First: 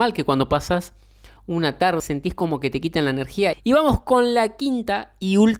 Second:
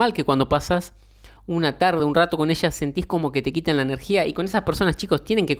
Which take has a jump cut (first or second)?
first